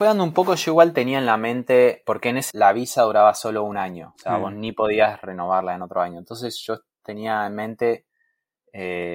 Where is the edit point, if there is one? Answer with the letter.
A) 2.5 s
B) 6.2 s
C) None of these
A